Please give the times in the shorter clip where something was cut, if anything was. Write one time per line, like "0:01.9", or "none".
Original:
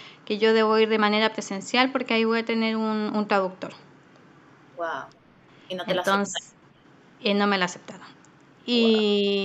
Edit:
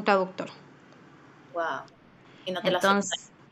none